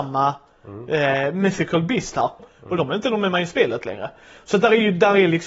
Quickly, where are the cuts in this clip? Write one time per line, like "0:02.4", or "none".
0:02.4